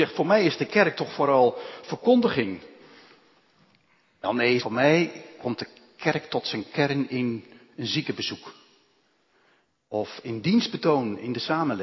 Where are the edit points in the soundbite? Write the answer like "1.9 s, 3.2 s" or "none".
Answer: 4.6 s